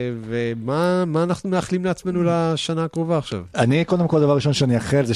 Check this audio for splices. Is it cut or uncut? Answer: uncut